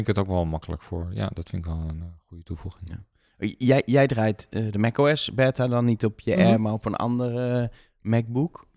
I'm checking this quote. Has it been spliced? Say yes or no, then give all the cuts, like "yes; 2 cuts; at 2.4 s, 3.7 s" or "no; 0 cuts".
no; 0 cuts